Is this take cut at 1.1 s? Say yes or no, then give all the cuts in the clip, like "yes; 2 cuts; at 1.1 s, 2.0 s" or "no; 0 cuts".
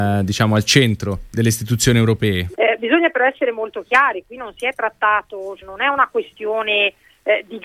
no; 2 cuts; at 2.5 s, 5.6 s